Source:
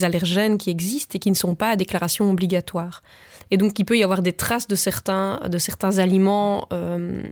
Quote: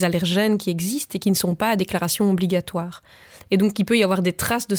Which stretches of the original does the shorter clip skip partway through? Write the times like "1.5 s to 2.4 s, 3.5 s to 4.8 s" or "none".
none